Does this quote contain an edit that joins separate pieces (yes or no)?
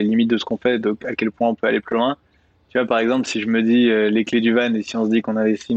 no